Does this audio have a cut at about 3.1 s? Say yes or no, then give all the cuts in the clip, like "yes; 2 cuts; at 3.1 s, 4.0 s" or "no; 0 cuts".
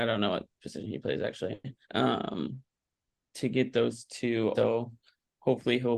no; 2 cuts; at 1.8 s, 4.5 s